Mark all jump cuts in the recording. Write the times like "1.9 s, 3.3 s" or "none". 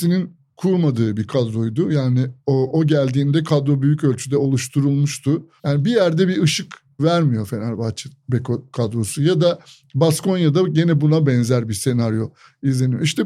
5.6 s